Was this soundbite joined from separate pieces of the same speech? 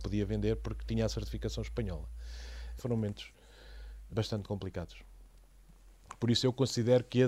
yes; 2 cuts; at 2.8 s, 4.1 s

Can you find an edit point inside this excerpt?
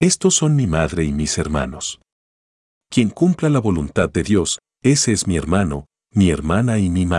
no; 0 cuts

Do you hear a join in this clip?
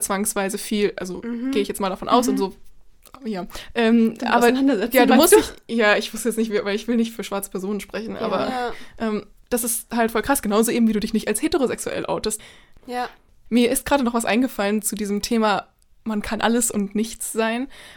no; 0 cuts

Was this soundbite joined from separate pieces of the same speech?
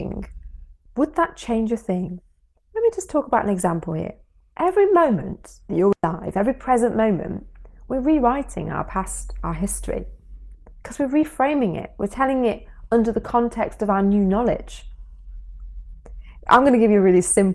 no; 0 cuts

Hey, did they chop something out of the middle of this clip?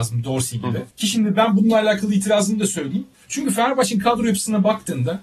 yes; 2 cuts; at 0.9 s, 3.1 s

